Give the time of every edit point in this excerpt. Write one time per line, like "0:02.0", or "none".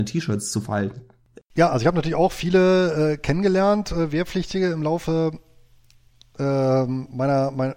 0:01.4